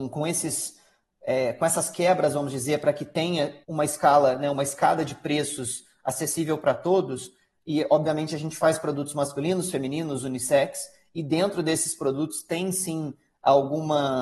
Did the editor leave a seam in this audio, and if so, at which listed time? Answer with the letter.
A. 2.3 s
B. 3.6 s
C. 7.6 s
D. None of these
B